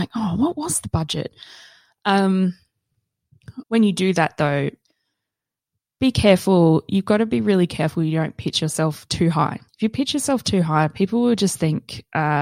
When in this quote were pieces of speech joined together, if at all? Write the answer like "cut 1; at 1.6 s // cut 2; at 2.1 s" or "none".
cut 1; at 3.6 s